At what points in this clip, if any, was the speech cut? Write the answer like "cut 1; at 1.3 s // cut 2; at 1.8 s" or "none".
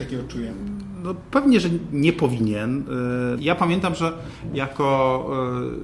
cut 1; at 3.3 s